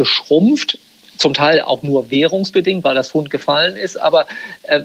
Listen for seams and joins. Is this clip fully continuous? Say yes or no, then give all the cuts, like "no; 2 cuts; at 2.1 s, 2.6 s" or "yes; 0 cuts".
yes; 0 cuts